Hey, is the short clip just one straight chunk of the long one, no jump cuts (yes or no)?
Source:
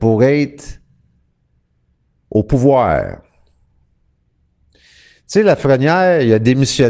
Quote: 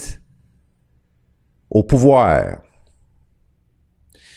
yes